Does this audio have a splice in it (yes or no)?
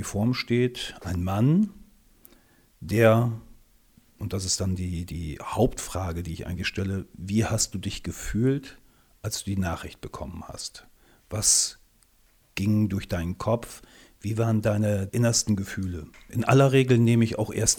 no